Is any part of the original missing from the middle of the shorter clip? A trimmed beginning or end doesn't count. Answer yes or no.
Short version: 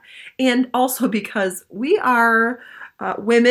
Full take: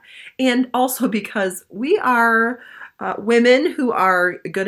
no